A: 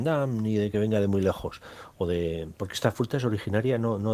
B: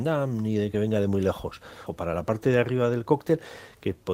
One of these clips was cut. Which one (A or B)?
B